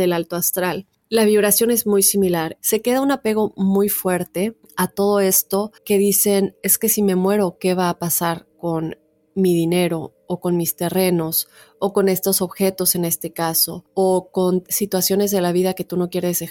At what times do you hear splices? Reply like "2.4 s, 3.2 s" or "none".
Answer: 2.6 s, 5.8 s

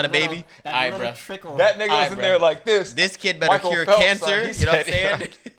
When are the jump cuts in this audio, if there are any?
none

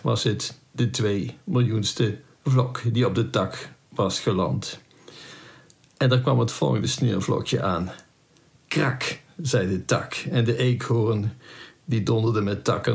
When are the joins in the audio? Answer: none

